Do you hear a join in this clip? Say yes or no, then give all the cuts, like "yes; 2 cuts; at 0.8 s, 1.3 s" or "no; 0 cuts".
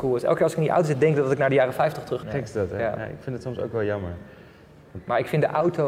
yes; 1 cut; at 2.2 s